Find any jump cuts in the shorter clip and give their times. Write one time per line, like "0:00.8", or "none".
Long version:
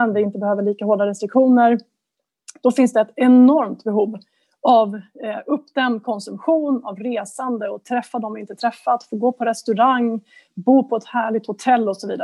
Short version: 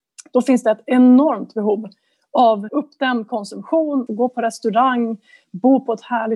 0:02.7
0:04.1